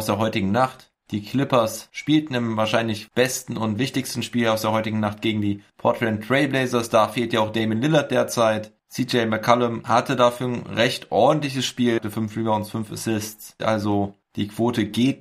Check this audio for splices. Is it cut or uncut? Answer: cut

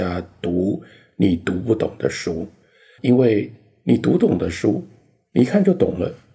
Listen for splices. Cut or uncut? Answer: cut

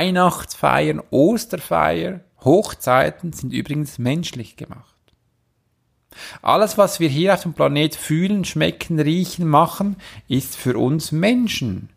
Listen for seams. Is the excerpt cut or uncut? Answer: uncut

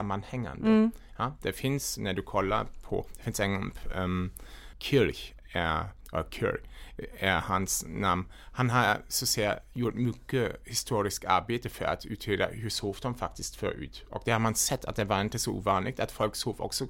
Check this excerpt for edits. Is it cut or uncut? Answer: cut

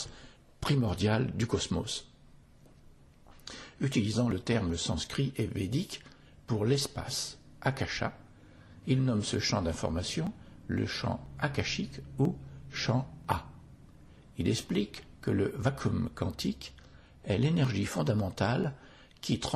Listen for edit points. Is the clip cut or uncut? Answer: uncut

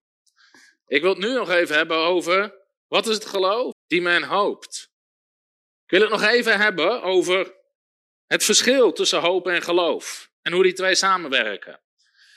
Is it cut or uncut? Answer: cut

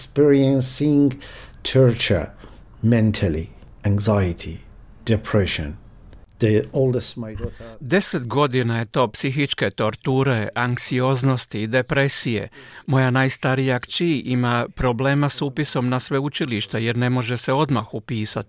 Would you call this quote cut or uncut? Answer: uncut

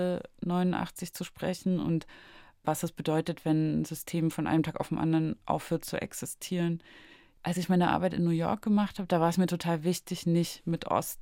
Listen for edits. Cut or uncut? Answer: uncut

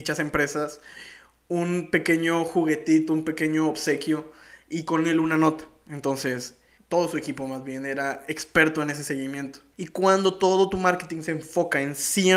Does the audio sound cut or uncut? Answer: cut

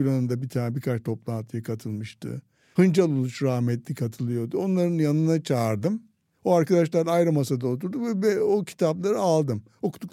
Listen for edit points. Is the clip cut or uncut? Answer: uncut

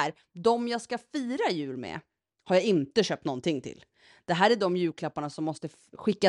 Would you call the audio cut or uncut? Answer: uncut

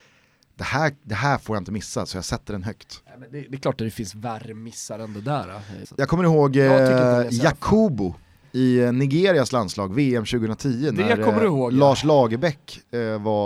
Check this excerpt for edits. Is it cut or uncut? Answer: cut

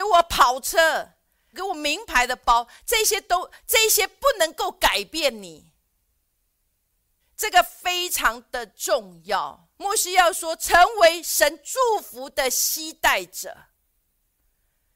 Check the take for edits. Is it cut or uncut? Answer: cut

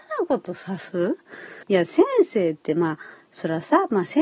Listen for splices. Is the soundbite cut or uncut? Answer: cut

